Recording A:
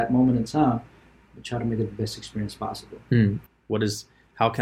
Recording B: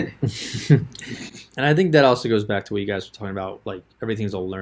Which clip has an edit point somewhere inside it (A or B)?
A